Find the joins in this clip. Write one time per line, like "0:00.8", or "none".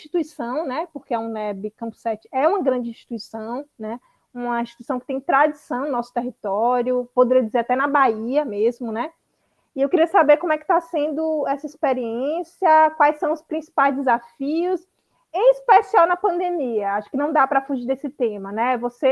none